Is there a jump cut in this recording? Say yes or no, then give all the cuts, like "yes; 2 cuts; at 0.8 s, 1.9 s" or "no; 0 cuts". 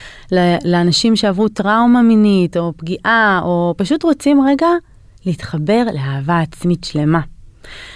no; 0 cuts